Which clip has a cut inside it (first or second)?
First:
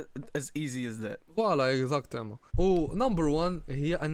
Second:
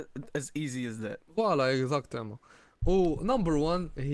first